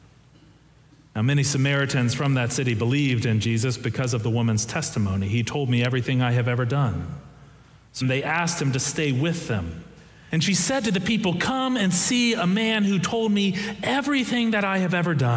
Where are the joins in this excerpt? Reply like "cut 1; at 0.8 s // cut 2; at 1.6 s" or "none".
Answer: cut 1; at 8.0 s // cut 2; at 10.3 s

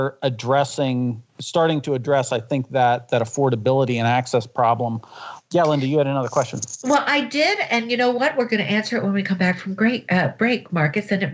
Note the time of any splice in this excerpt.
cut 1; at 1.3 s // cut 2; at 5.4 s

